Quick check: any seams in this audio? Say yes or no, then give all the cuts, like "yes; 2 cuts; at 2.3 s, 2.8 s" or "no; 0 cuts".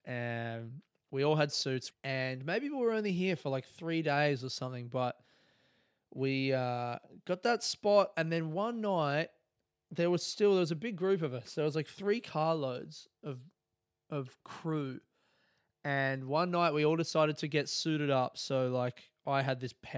yes; 1 cut; at 1.9 s